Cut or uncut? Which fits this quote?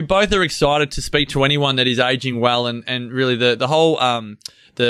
uncut